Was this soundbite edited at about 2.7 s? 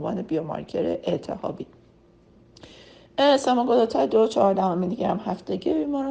no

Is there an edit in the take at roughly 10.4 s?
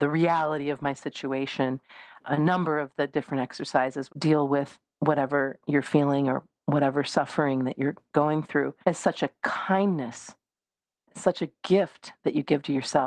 no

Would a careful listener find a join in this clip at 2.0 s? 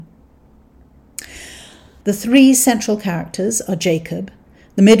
yes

